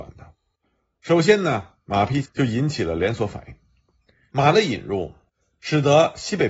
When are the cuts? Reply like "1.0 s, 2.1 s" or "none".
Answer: 2.2 s, 4.3 s